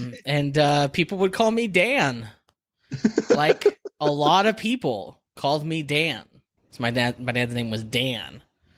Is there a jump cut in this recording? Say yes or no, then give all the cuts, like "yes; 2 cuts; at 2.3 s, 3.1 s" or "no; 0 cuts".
yes; 1 cut; at 6.6 s